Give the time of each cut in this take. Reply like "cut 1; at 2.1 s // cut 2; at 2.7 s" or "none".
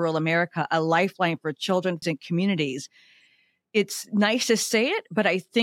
cut 1; at 2.0 s